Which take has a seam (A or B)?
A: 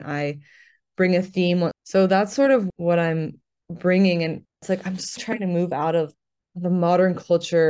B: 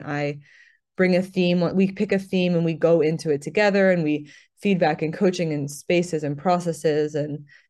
A